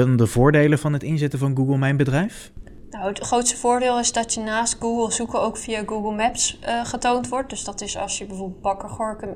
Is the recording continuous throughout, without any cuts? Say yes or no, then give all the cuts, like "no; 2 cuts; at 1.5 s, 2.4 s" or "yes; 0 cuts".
yes; 0 cuts